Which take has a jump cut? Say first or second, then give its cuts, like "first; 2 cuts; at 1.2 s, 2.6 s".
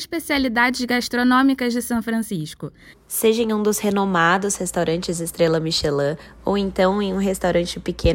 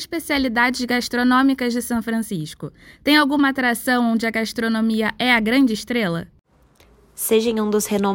first; 1 cut; at 2.9 s